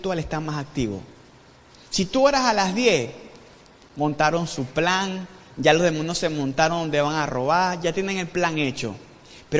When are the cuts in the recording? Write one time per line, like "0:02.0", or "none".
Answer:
0:03.8